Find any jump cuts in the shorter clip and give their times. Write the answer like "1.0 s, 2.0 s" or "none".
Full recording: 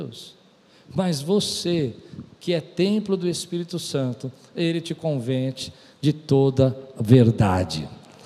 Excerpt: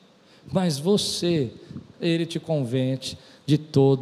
1.9 s

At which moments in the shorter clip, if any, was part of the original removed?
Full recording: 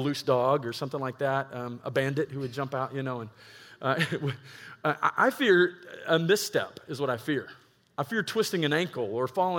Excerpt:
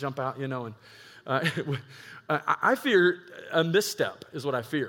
none

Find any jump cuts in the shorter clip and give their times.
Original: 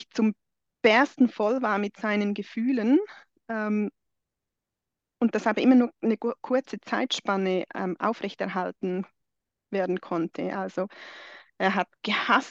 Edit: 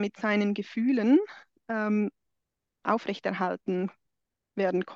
2.8 s

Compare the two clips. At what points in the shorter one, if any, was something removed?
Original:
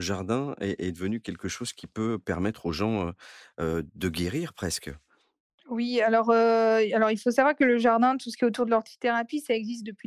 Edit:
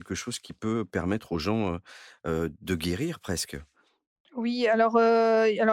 none

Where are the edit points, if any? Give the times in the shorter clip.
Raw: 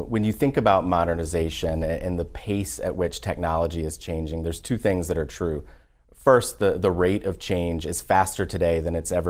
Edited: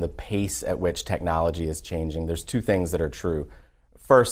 none

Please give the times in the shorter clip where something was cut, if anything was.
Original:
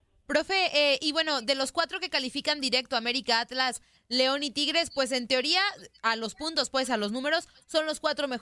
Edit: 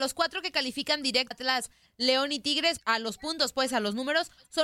1.3 s, 2.8 s

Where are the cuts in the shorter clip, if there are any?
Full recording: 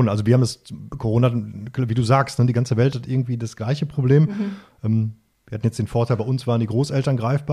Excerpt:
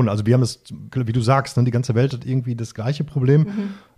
0.9 s

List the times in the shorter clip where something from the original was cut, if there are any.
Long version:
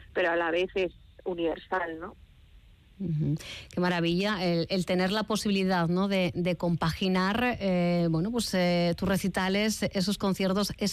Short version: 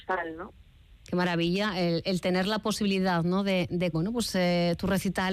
1.0 s, 3.9 s

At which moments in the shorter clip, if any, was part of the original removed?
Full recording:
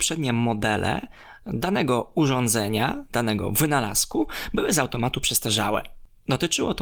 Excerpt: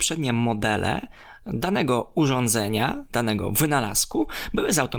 none

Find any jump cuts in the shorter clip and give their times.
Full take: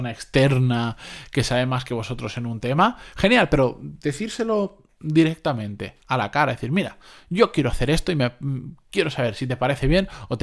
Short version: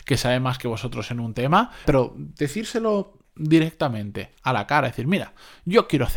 1.8 s

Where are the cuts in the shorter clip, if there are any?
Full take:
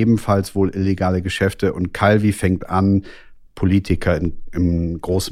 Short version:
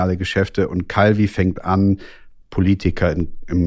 none

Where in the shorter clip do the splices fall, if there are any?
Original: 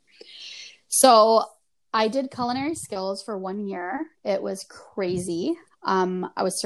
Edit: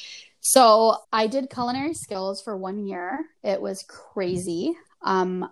1.0 s

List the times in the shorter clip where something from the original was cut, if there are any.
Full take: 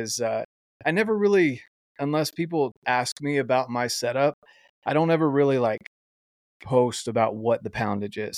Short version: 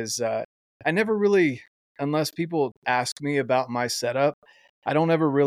none

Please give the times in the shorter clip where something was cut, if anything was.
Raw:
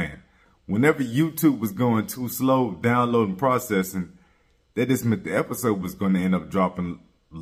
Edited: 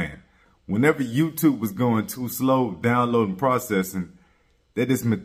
none

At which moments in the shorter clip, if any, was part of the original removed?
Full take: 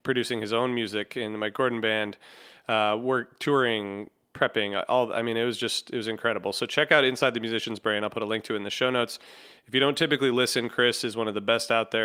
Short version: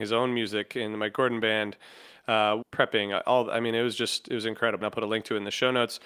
2.6 s, 4.8 s

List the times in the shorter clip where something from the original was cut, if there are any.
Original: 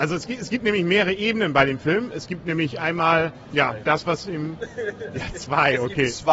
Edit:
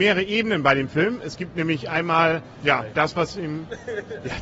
none

